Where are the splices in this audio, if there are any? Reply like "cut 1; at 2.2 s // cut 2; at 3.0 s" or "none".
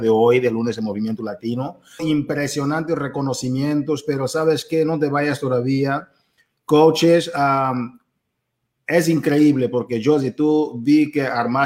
cut 1; at 2.0 s